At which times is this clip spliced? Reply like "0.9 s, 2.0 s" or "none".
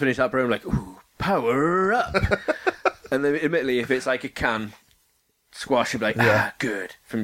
none